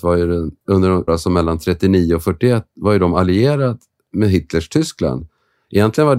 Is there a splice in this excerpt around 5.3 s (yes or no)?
no